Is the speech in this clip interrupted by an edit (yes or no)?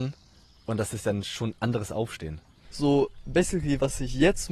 yes